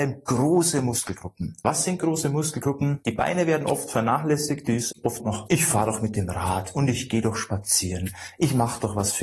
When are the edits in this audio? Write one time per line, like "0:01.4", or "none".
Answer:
0:03.0
0:05.2